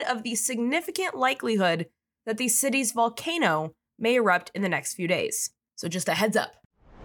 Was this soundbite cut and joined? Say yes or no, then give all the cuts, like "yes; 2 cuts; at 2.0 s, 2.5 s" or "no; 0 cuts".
no; 0 cuts